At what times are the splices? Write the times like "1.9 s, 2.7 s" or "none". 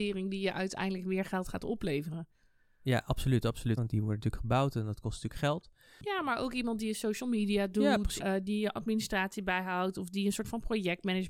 3.8 s, 8.2 s

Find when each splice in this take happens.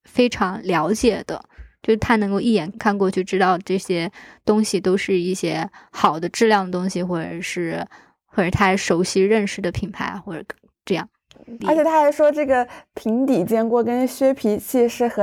11.6 s

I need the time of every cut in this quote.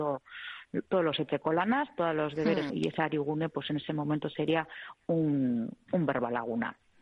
2.7 s

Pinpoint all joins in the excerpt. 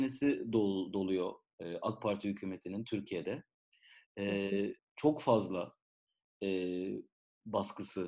4.8 s

